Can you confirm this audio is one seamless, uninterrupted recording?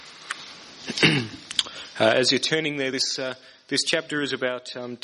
yes; 0 cuts

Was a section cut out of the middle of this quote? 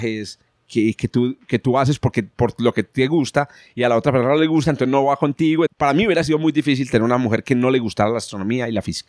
yes; 1 cut; at 5.7 s

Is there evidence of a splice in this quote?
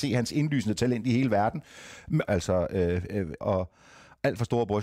yes; 2 cuts; at 2.2 s, 3.4 s

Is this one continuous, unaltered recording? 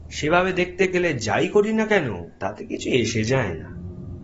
no; 1 cut; at 2.3 s

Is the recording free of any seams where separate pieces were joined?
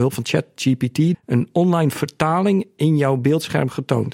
no; 1 cut; at 1.1 s

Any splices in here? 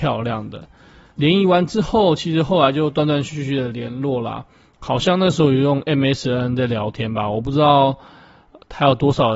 no; 0 cuts

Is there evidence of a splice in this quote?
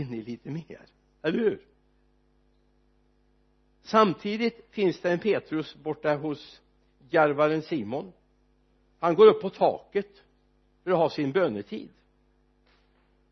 no; 0 cuts

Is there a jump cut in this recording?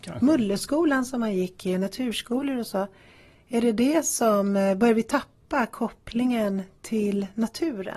no; 0 cuts

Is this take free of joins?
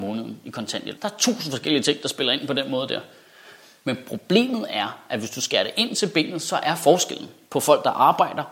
no; 1 cut; at 1.0 s

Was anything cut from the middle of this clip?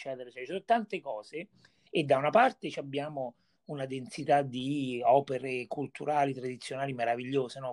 yes; 1 cut; at 1.9 s

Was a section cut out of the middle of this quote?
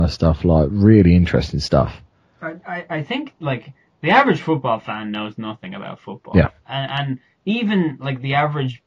no; 0 cuts

